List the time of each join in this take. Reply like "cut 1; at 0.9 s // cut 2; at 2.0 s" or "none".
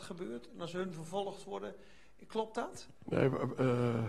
cut 1; at 3.0 s